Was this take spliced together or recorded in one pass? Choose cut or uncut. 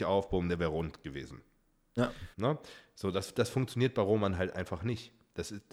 cut